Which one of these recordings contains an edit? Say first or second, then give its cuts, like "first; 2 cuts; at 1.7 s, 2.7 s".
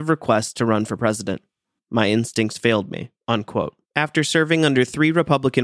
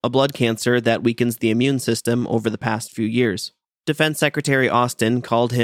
first; 2 cuts; at 1.8 s, 3.8 s